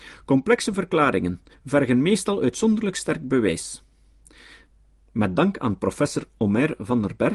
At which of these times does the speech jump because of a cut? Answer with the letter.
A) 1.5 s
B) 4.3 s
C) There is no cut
A